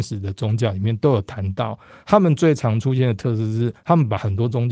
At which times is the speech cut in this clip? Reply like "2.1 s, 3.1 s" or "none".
none

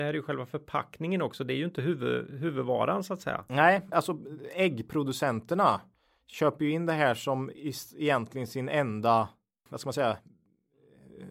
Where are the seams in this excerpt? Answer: 3.9 s, 9.7 s

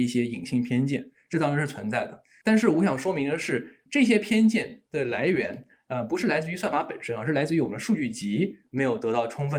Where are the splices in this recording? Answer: none

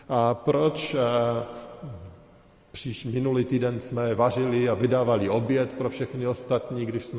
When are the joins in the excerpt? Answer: none

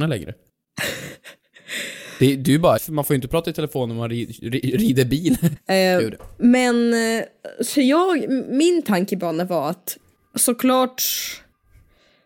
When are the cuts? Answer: 2.8 s, 5.6 s

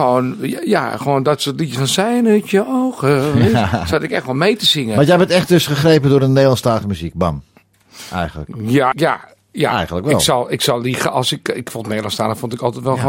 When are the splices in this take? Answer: 8.9 s

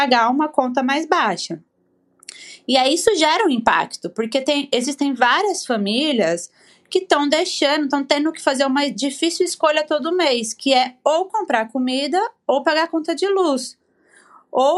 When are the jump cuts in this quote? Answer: none

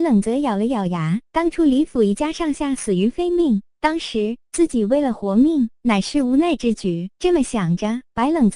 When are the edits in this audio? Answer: 3.7 s, 7.1 s

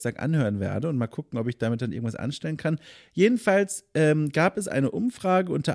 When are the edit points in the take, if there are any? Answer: none

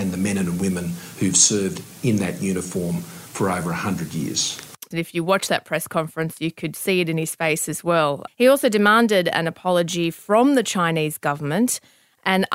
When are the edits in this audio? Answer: 4.9 s, 8.3 s

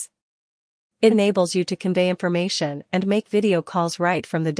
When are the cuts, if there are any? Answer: 1.1 s

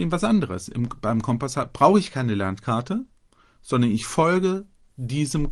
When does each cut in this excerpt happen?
none

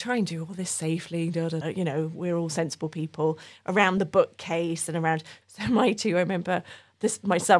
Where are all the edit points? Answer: 1.6 s, 5.4 s

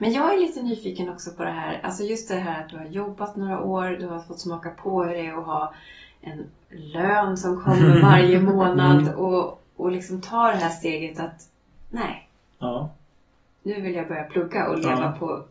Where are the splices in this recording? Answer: none

